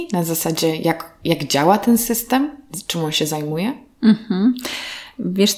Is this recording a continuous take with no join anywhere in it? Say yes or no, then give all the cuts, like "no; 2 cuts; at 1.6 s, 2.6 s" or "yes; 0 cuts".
yes; 0 cuts